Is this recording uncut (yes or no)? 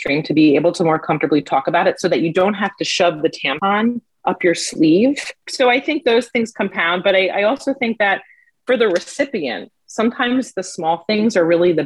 yes